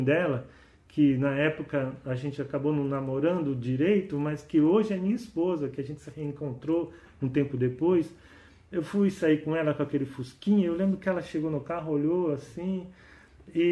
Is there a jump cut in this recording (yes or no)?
no